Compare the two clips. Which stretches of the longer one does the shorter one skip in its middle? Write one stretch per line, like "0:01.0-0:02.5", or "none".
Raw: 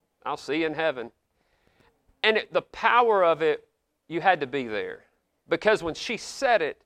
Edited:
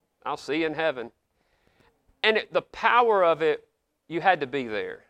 none